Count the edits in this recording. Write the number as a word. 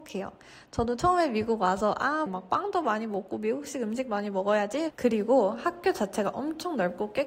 two